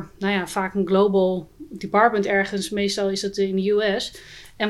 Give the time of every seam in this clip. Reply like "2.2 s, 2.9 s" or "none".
none